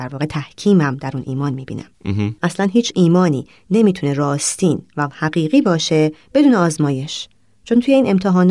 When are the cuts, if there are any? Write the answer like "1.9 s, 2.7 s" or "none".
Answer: 2.4 s